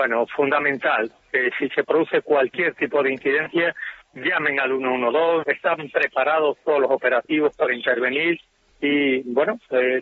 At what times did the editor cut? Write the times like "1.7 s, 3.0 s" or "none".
5.4 s